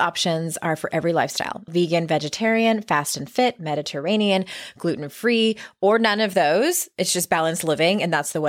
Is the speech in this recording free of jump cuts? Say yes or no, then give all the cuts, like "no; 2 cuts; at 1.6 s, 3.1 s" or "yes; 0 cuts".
no; 1 cut; at 1.7 s